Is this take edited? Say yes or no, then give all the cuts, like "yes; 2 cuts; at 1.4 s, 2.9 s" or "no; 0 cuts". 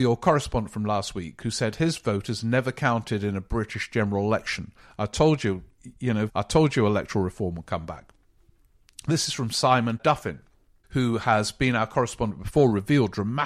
yes; 1 cut; at 6.3 s